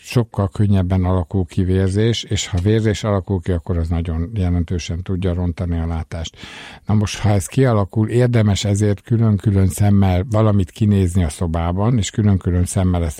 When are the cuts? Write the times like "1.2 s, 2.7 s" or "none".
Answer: none